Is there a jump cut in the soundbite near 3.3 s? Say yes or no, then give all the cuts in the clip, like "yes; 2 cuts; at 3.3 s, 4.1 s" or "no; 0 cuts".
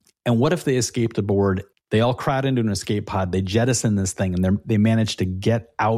no; 1 cut; at 1.7 s